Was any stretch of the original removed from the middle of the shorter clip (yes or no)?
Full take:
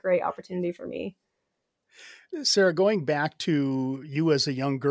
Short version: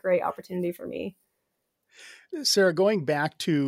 no